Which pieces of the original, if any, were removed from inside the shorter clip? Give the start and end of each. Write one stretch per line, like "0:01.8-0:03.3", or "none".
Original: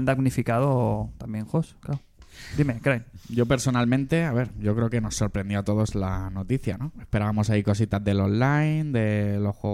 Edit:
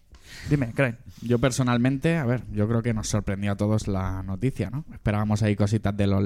none